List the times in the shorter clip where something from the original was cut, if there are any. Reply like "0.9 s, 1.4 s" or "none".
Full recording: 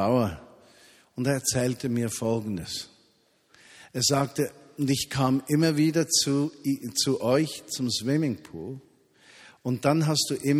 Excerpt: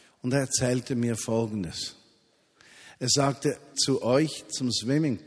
3.7 s